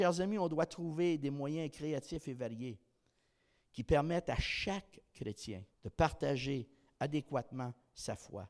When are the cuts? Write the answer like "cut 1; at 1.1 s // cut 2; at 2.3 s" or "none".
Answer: cut 1; at 5.7 s